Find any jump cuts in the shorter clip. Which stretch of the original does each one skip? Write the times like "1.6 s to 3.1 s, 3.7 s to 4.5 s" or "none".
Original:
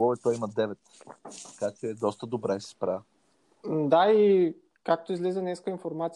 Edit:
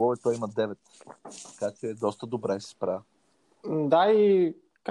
none

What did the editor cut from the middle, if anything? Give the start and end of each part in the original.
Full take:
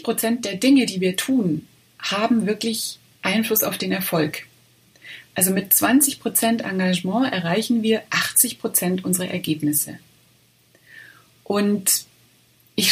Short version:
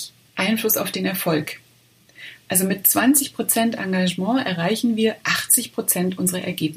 none

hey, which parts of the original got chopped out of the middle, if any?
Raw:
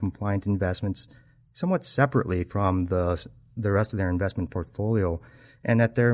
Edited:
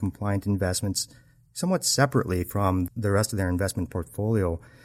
2.9 s to 3.5 s

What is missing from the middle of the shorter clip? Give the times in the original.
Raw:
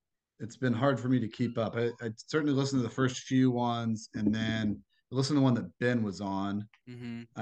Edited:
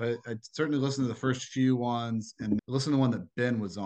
4.3 s to 5.0 s

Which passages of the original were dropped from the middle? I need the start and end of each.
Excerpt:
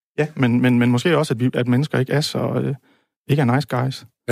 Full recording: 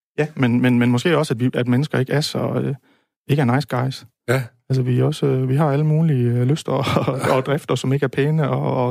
none

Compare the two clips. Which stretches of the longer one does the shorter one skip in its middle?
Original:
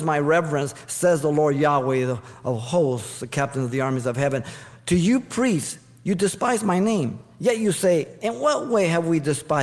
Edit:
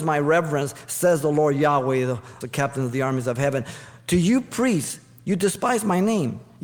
2.4 s to 3.2 s

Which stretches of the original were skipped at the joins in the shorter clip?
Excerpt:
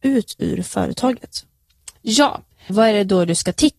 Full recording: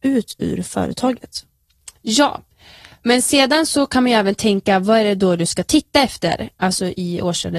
2.7 s to 4.8 s

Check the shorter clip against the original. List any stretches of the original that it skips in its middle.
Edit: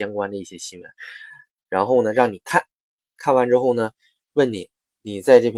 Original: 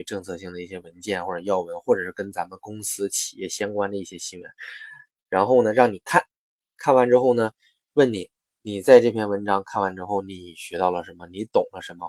none

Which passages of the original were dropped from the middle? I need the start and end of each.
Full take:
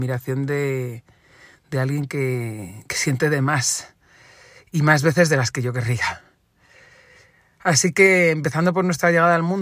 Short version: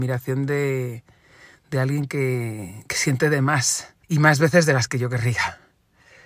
4.0 s to 4.7 s

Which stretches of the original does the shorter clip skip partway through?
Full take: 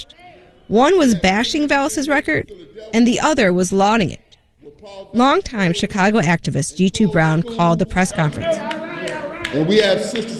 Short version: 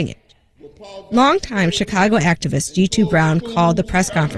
none

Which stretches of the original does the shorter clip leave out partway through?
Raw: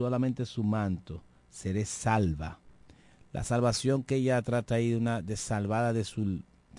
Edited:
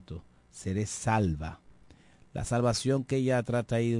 none

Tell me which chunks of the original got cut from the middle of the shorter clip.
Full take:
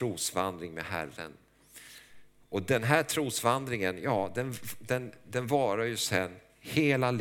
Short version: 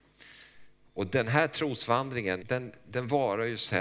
4.0 s to 4.8 s

